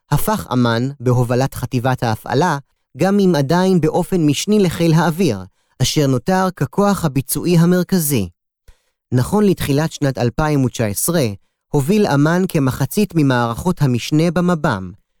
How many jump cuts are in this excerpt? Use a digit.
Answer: 1